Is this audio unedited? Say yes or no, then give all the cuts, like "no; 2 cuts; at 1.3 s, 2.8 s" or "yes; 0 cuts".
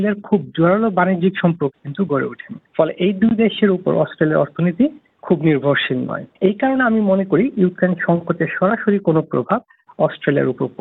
no; 2 cuts; at 2.6 s, 6.4 s